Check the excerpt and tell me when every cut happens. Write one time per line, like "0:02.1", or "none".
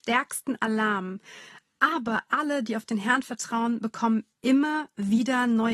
none